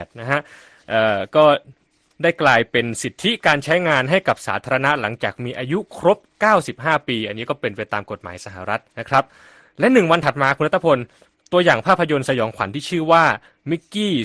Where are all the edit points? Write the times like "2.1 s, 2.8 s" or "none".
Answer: 8.9 s

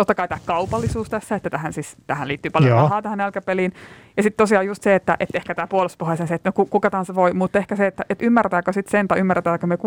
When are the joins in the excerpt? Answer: none

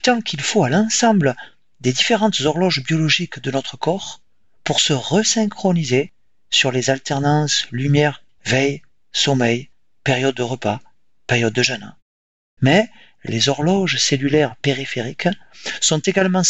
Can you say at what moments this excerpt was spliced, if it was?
8.4 s, 12.6 s

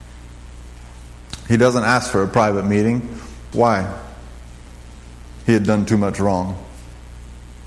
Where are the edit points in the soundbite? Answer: 3.5 s, 5.5 s

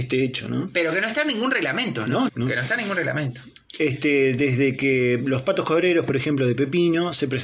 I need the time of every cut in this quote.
2.3 s

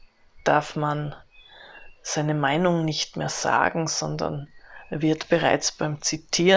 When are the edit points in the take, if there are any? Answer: none

